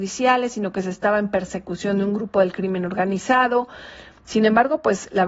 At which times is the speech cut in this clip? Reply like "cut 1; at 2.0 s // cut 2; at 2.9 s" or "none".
none